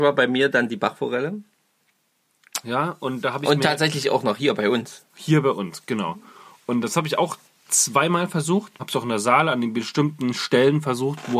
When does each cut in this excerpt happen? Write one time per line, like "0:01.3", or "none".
0:02.6
0:08.8